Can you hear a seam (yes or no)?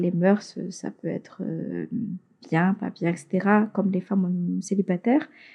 no